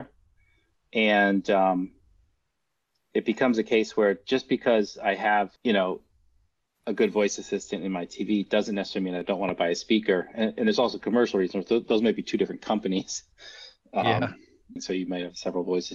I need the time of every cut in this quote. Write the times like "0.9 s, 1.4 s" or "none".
5.6 s, 14.8 s